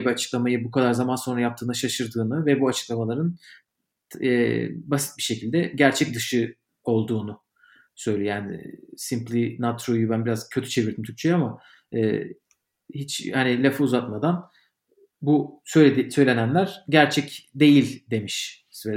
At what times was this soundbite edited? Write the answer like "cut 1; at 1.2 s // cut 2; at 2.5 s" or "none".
none